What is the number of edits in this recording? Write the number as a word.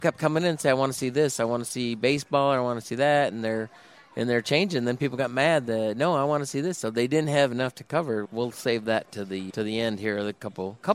two